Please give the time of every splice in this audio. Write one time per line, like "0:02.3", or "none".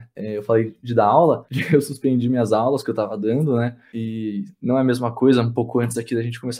none